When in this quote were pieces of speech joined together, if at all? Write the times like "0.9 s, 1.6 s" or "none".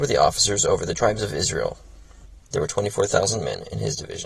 2.4 s